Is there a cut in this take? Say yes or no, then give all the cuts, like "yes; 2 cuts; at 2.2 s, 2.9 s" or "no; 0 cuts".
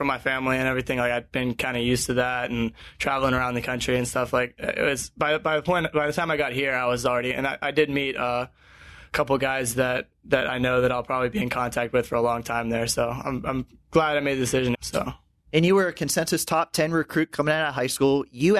yes; 1 cut; at 14.8 s